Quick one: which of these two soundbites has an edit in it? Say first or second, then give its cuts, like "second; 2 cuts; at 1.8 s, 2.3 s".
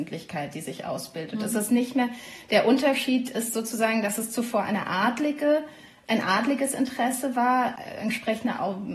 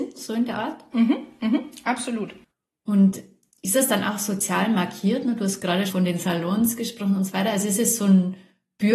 second; 1 cut; at 5.9 s